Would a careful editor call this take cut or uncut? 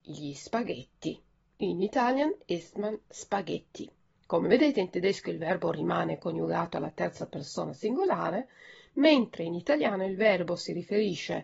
uncut